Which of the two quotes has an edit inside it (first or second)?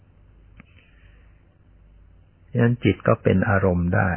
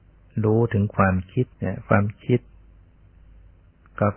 second